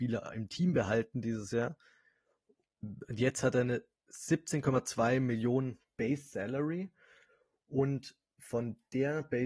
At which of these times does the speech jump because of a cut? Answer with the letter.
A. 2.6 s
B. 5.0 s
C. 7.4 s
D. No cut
A